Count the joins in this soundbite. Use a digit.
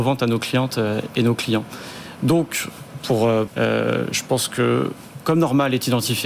1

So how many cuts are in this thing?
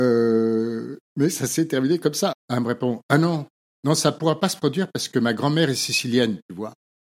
1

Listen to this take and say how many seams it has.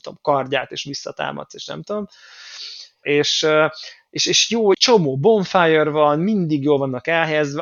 2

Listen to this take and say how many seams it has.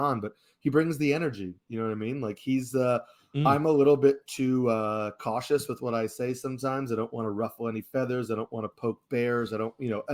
0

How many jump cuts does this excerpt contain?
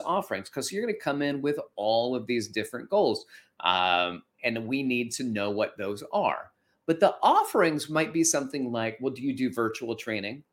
1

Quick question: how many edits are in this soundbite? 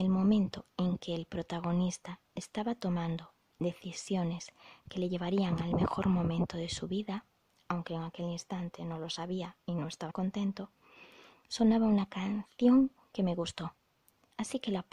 1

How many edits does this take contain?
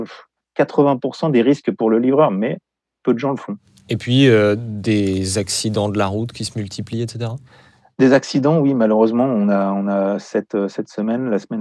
0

